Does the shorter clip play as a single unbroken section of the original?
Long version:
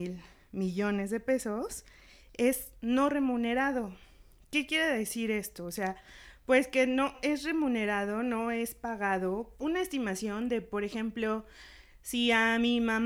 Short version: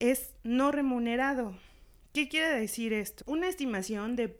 no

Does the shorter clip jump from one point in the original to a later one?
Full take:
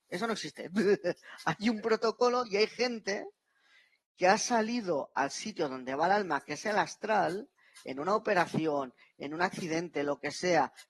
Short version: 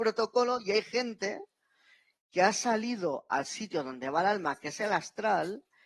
no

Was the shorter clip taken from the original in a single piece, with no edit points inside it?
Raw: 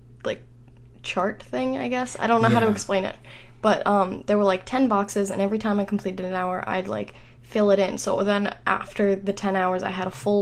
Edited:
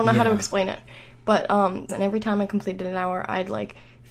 no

